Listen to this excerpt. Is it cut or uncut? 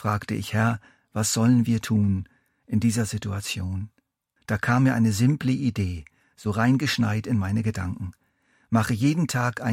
cut